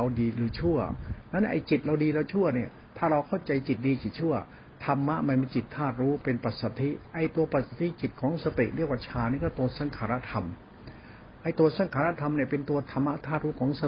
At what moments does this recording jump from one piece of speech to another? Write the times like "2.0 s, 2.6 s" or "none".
none